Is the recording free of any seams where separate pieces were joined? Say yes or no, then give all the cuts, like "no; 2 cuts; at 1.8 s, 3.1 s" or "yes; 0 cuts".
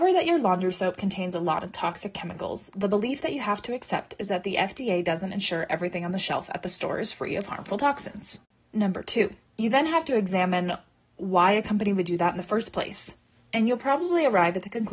no; 1 cut; at 9.5 s